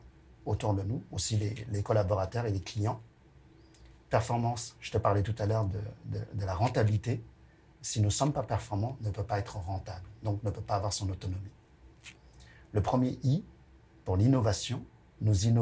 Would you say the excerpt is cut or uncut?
cut